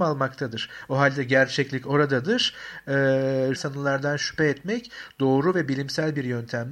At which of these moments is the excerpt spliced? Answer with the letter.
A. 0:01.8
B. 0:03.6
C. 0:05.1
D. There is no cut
B